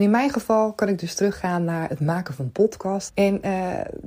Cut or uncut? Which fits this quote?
cut